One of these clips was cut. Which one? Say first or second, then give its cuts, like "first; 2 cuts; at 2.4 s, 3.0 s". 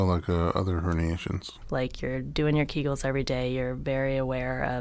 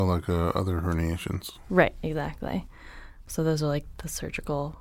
first; 1 cut; at 1.6 s